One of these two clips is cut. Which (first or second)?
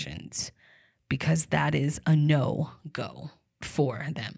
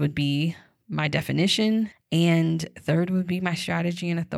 second